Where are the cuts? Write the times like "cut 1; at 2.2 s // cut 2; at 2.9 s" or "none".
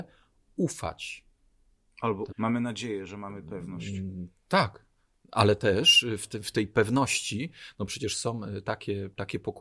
cut 1; at 2.3 s